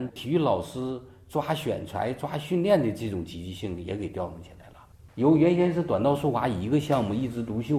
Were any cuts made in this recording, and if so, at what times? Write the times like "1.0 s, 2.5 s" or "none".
5.1 s